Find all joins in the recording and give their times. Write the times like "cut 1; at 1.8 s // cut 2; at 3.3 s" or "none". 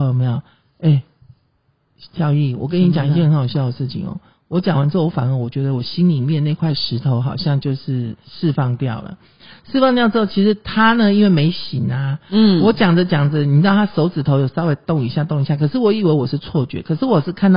none